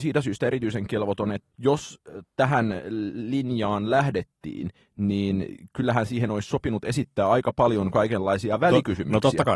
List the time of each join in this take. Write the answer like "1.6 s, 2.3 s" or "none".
1.5 s

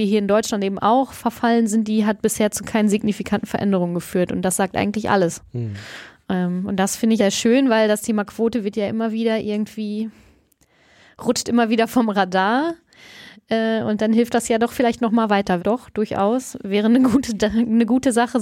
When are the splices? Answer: 7.2 s, 15.6 s

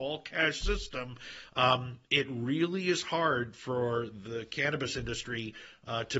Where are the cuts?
none

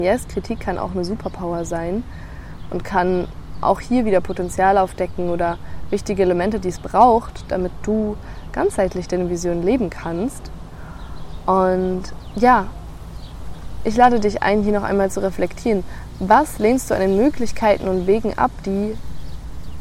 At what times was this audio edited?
none

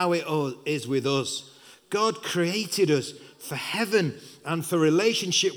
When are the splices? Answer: none

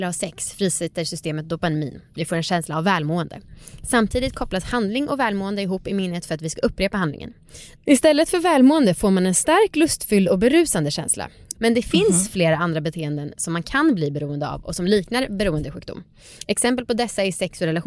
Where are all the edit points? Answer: 7.7 s, 11.5 s

